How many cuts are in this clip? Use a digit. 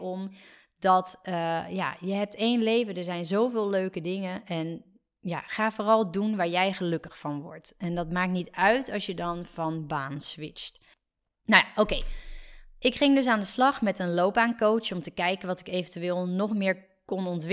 0